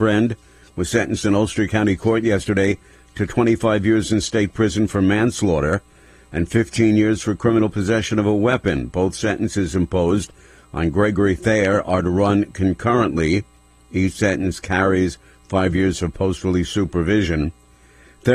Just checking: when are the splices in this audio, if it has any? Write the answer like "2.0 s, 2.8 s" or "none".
none